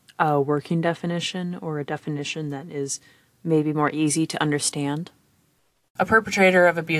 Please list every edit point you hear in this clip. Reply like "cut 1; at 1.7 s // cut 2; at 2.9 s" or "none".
cut 1; at 5.9 s